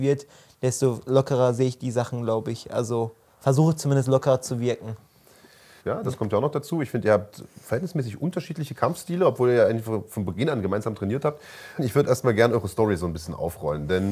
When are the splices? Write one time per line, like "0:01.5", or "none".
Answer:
0:05.8
0:11.8